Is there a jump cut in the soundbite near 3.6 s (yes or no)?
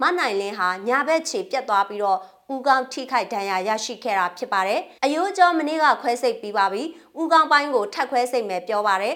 no